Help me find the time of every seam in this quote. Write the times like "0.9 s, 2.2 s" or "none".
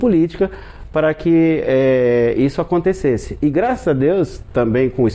none